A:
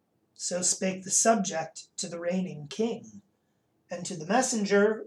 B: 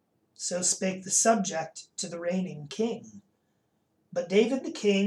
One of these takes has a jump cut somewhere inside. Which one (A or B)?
A